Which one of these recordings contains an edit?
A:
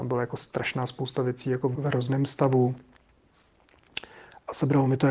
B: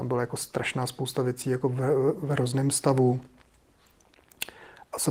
A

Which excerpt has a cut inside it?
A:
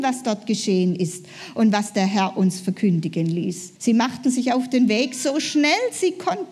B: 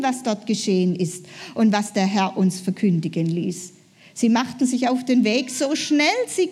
A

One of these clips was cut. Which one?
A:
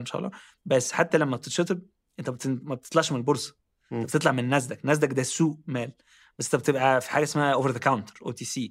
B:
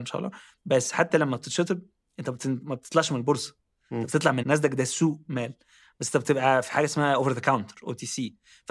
B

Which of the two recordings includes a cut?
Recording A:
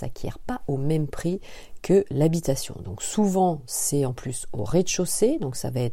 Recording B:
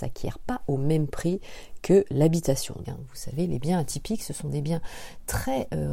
B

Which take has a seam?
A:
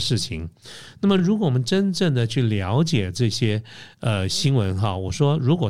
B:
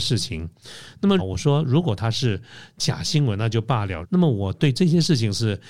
B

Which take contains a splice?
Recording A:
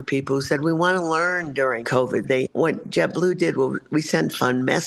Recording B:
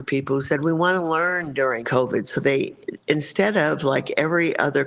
A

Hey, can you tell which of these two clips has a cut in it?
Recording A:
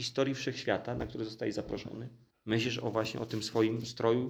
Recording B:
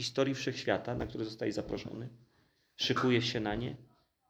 A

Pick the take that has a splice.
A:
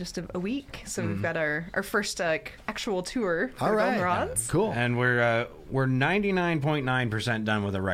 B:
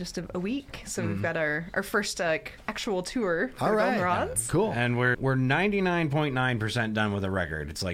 B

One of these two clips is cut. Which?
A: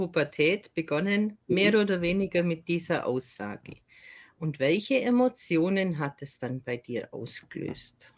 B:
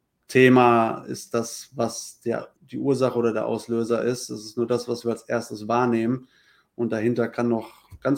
B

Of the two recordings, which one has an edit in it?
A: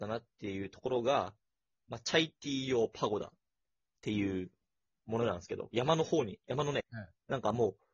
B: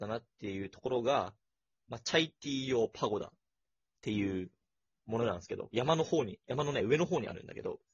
A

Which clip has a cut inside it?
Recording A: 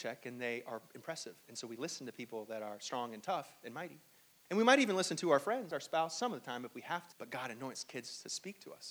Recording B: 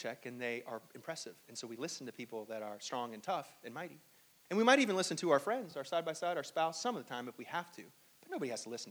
A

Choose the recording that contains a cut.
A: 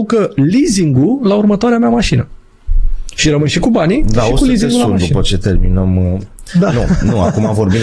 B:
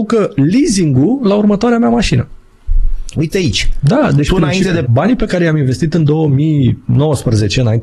B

